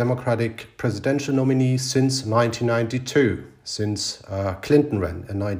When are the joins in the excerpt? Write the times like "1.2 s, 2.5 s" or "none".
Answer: none